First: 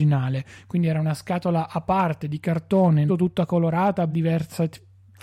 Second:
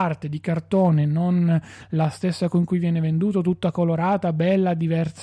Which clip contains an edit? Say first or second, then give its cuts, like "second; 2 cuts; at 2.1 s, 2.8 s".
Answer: first; 2 cuts; at 3.1 s, 4.1 s